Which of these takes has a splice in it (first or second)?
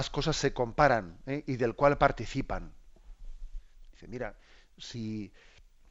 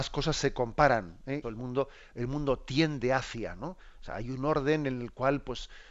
second